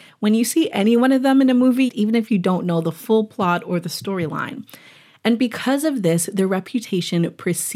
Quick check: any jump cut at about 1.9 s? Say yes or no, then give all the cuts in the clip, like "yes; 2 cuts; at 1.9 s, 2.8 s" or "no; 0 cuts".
yes; 1 cut; at 1.9 s